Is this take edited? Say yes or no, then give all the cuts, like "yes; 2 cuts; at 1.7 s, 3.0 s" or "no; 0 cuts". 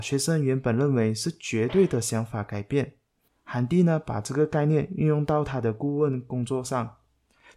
yes; 1 cut; at 3.3 s